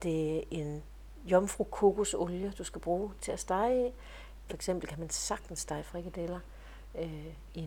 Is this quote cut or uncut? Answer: cut